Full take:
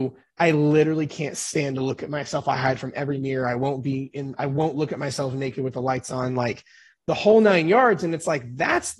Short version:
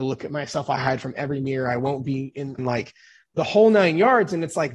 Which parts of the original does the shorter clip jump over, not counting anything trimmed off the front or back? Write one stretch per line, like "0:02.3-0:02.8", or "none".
0:04.4-0:06.3